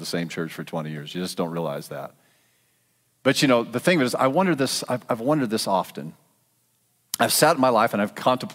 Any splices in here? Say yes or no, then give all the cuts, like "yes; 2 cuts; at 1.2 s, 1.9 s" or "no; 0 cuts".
no; 0 cuts